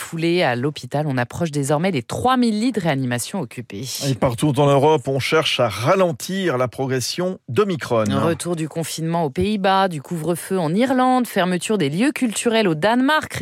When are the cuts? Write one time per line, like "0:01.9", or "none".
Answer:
none

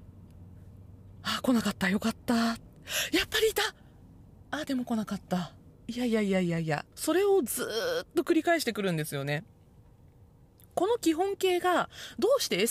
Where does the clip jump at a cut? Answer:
0:05.7
0:06.9

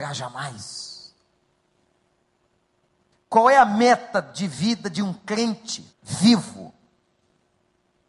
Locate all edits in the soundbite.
0:03.1
0:05.9

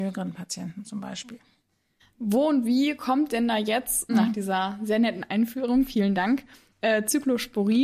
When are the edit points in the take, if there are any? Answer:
0:04.1

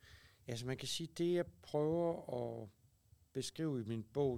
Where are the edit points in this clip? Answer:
none

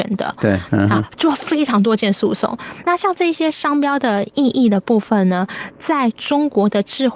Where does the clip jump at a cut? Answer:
none

